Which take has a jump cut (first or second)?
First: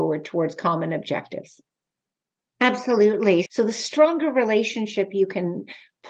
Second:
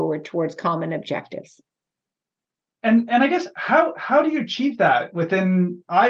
first